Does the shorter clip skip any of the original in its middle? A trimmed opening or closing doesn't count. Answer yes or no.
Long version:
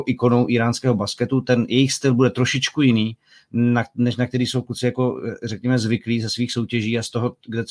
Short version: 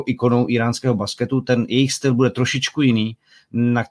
no